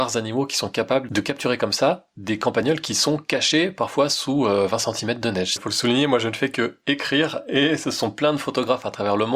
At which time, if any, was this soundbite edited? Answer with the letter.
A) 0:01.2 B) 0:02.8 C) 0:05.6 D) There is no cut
C